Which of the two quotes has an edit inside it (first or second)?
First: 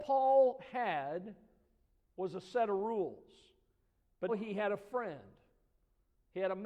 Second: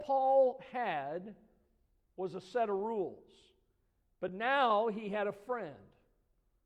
first